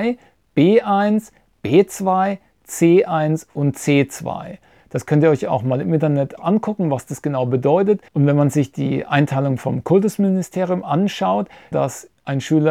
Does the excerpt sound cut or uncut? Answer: cut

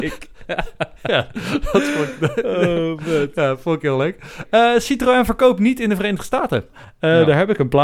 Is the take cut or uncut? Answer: cut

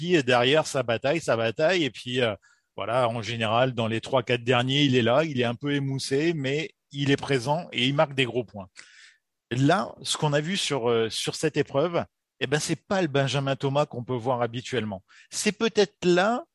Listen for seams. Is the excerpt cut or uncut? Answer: uncut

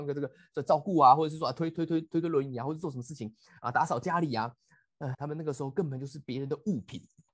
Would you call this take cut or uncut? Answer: cut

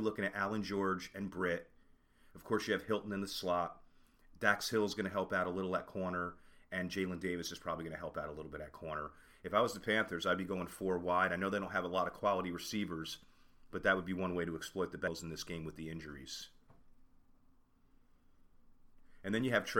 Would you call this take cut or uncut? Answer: uncut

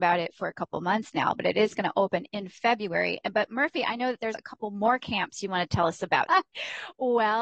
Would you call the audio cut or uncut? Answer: cut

